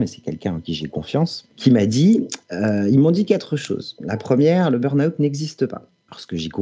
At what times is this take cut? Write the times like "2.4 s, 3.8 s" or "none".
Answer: none